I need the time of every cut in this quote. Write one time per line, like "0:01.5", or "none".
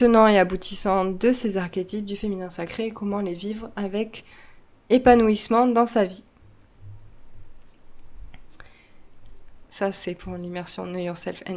0:09.6